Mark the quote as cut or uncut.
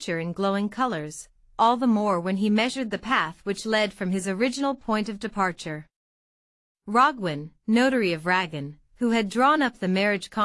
uncut